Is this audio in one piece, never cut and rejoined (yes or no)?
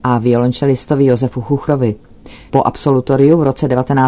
no